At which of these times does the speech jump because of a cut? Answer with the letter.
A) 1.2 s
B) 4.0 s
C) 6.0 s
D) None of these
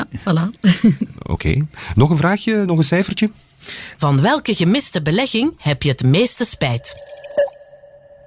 B